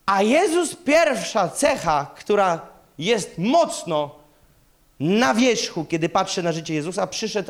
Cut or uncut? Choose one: uncut